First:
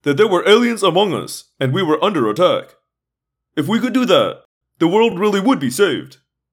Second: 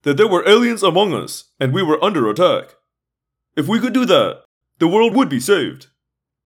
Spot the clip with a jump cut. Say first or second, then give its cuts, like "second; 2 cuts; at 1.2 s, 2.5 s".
second; 1 cut; at 5.1 s